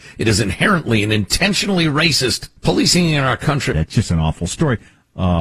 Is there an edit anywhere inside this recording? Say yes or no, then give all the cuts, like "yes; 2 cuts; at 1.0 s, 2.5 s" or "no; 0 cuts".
yes; 2 cuts; at 2.6 s, 3.7 s